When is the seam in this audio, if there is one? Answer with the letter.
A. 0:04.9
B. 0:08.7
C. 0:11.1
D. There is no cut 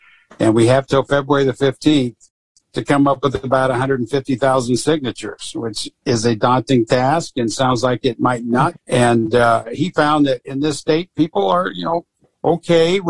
B